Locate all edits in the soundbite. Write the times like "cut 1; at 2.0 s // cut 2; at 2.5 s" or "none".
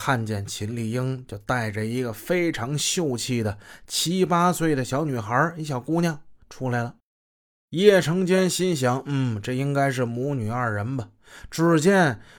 none